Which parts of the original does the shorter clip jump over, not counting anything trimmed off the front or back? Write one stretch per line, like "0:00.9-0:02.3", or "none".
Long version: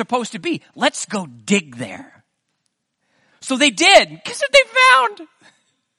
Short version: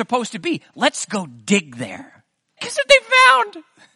0:02.6-0:04.2